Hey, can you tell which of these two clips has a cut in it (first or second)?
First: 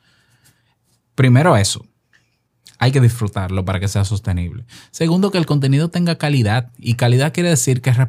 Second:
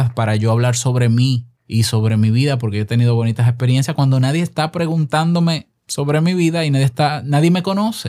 second